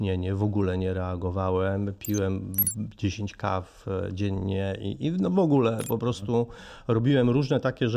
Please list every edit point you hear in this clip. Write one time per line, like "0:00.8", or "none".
none